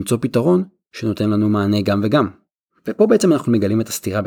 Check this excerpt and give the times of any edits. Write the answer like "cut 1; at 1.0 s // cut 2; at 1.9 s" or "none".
none